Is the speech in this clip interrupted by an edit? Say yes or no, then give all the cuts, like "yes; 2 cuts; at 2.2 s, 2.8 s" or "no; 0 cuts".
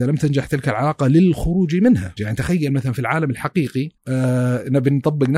yes; 2 cuts; at 2.2 s, 4.0 s